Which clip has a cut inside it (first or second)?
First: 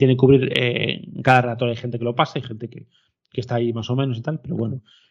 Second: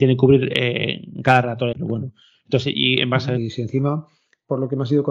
second